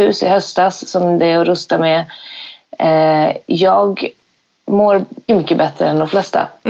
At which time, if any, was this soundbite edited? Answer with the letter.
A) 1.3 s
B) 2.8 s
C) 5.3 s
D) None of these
C